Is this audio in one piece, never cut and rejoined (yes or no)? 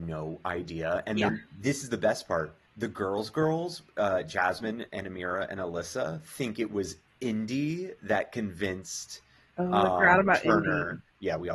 no